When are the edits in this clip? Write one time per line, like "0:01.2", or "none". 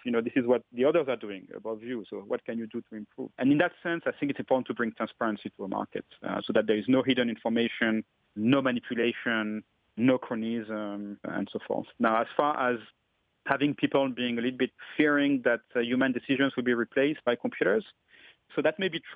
0:03.3